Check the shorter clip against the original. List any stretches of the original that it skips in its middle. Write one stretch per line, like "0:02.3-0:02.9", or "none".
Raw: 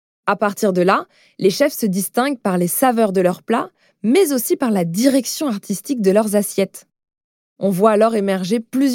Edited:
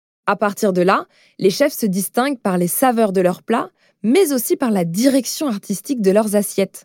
none